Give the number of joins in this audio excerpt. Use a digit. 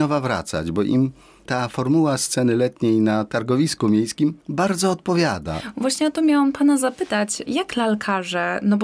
1